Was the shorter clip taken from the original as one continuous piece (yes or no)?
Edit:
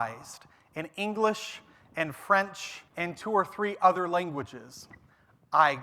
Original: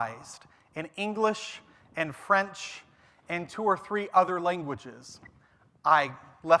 no